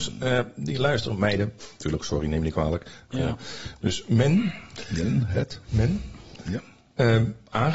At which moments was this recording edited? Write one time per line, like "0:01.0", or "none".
0:03.1